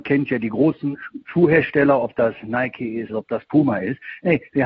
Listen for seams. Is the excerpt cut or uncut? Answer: cut